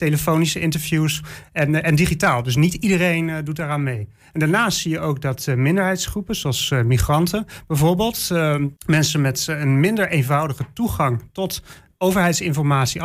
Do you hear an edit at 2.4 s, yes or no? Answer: no